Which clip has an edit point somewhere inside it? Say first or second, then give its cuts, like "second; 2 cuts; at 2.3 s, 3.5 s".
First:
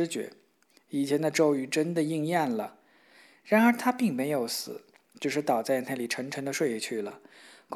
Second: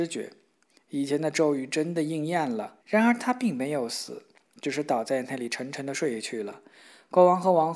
second; 1 cut; at 2.8 s